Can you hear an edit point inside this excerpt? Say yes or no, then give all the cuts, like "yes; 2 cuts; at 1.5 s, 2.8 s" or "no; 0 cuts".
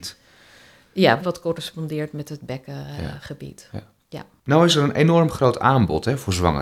yes; 1 cut; at 1.2 s